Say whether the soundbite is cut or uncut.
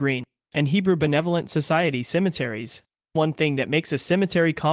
uncut